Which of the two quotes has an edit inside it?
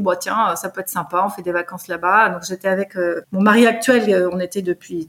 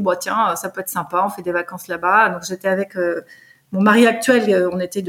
first; 1 cut; at 3.2 s

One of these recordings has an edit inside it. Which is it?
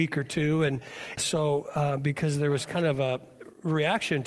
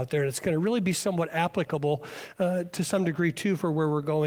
first; 1 cut; at 1.2 s

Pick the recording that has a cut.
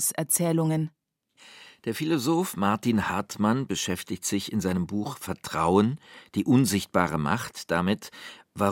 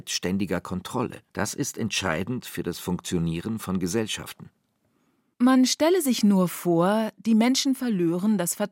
second; 1 cut; at 1.3 s

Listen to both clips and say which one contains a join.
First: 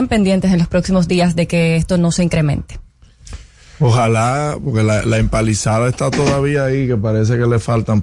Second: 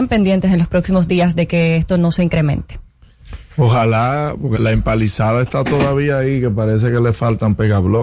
second; 2 cuts; at 3.5 s, 4.6 s

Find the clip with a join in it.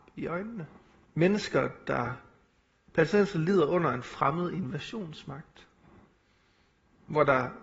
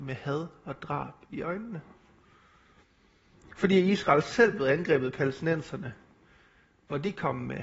first; 1 cut; at 1.1 s

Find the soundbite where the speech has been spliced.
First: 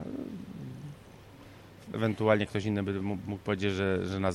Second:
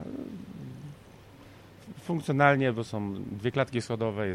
first; 1 cut; at 1.9 s

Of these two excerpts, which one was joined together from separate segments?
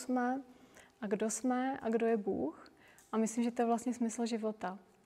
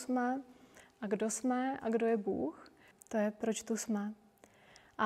second; 1 cut; at 2.9 s

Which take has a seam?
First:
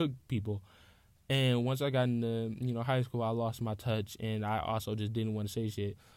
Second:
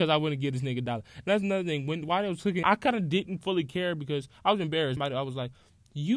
second; 2 cuts; at 2.6 s, 5.0 s

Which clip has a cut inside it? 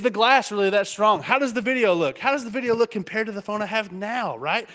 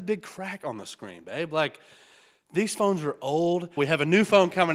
second; 1 cut; at 3.8 s

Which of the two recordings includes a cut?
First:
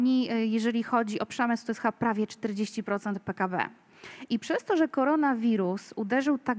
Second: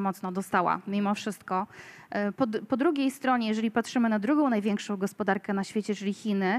second; 1 cut; at 2.4 s

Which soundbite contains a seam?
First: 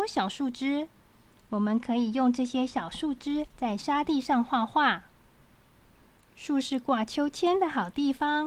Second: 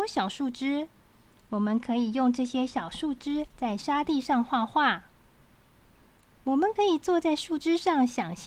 second; 1 cut; at 6.3 s

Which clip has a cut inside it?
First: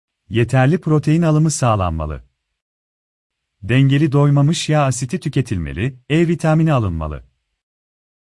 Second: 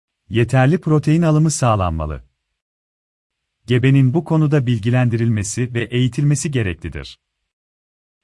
second; 1 cut; at 3.5 s

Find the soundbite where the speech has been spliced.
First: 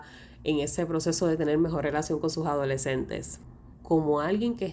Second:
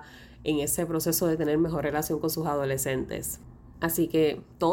first; 1 cut; at 3.7 s

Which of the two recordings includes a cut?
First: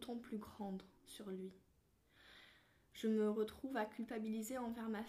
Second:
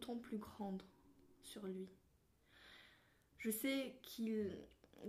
first; 2 cuts; at 1.0 s, 2.8 s

